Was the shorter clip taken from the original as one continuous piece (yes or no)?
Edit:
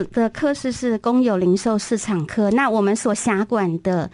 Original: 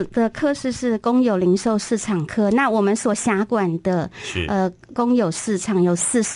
yes